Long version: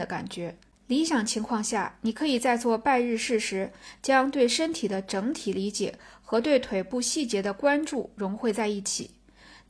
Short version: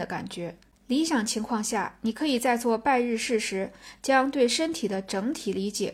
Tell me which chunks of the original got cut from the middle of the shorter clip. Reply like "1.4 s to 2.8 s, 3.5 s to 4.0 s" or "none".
none